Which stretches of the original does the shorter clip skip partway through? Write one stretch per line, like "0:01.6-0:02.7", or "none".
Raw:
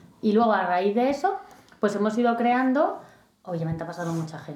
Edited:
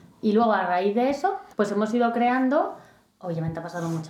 0:01.5-0:01.8